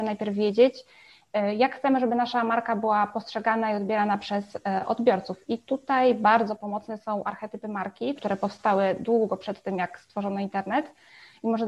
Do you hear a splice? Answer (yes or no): yes